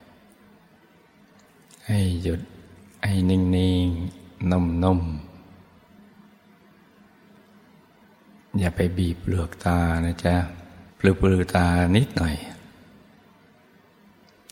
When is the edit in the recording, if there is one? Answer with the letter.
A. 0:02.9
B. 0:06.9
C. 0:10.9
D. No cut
C